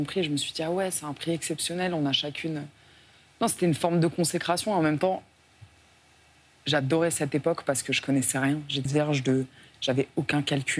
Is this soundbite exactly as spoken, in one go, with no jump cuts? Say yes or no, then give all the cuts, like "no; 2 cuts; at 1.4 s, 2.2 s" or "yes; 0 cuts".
no; 1 cut; at 8.9 s